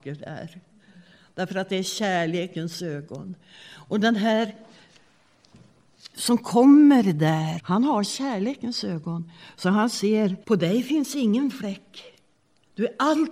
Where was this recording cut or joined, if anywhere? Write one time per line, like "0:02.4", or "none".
0:07.6
0:10.4